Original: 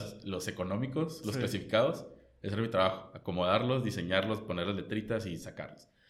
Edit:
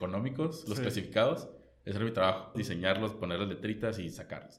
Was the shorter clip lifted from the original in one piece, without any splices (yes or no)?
no